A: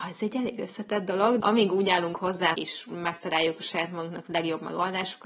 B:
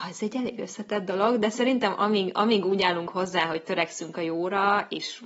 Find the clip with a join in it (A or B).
A